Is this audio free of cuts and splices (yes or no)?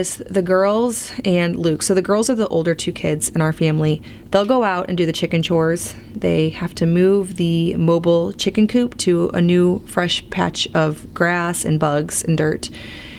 yes